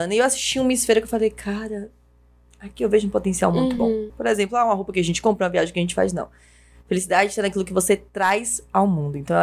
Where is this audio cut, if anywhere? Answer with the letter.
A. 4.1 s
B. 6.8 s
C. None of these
A